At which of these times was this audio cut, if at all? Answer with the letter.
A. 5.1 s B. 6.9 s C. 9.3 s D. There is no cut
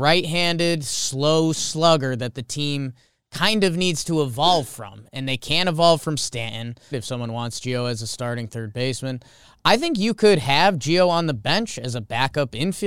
B